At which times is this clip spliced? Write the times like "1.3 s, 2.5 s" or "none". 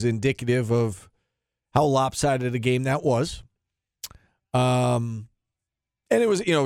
none